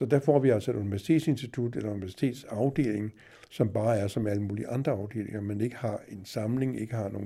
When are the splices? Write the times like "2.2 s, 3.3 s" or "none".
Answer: none

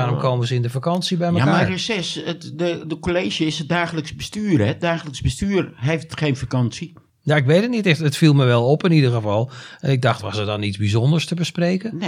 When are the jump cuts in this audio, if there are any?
none

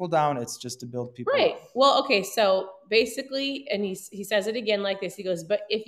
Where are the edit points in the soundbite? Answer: none

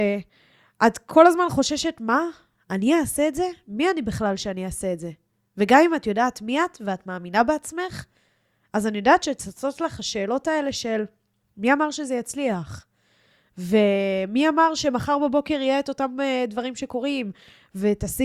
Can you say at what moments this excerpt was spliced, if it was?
none

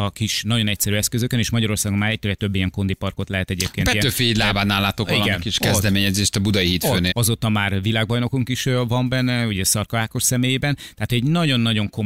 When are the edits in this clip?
7.1 s

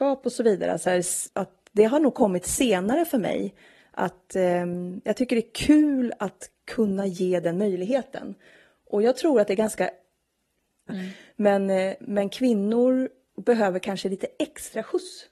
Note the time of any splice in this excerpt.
1.3 s, 10.9 s

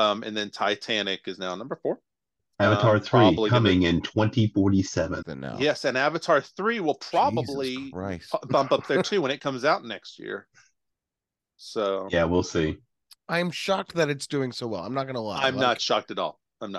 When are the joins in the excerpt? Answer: 5.2 s

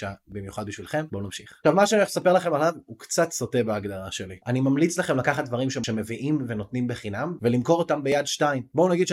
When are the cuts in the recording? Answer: 1.1 s, 7.4 s

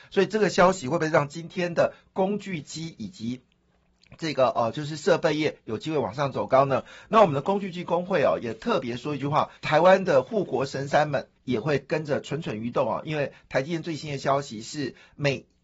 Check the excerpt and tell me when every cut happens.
9.6 s, 11.4 s

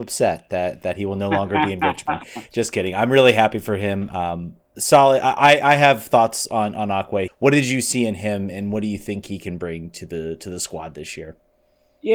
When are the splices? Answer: 7.3 s, 8.5 s

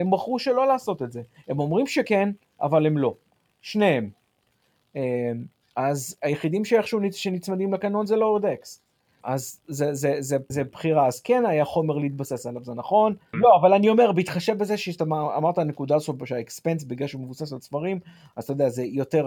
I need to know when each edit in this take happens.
9.2 s, 10.5 s, 13.3 s

